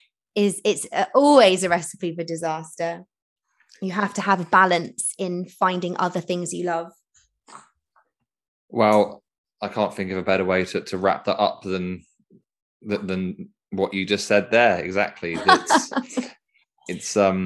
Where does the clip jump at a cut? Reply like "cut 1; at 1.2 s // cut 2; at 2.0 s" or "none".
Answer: none